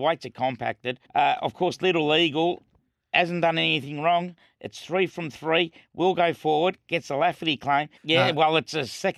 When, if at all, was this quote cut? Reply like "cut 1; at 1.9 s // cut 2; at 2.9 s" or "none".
cut 1; at 1.0 s // cut 2; at 8.0 s

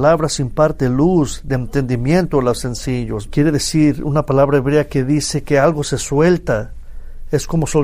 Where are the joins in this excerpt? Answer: cut 1; at 3.3 s

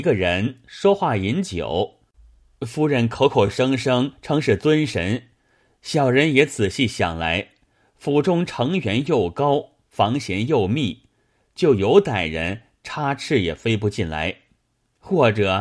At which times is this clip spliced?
none

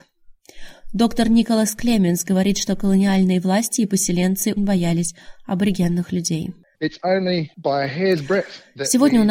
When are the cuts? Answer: cut 1; at 4.6 s // cut 2; at 6.7 s

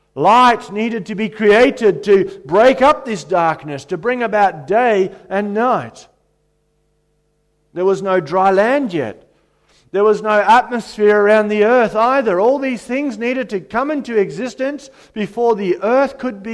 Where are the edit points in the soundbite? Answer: none

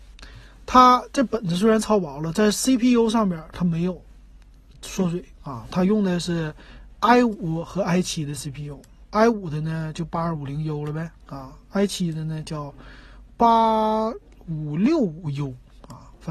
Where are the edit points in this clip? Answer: none

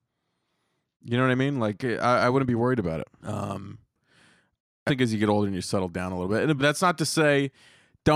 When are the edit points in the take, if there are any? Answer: cut 1; at 3.2 s // cut 2; at 4.9 s // cut 3; at 6.6 s

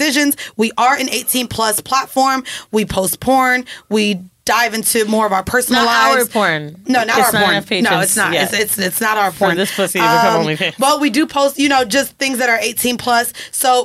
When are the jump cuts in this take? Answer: none

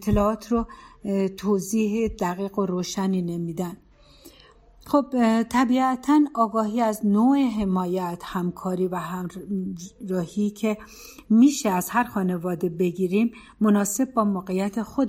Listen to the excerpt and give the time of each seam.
none

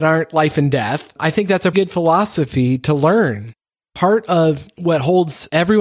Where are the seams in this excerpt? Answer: cut 1; at 1.7 s

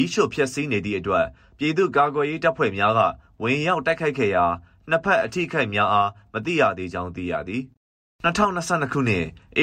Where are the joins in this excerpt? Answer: none

